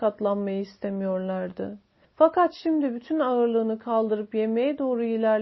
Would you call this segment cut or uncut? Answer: cut